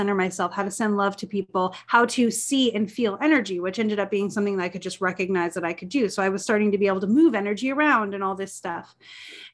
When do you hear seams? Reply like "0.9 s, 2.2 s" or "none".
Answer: none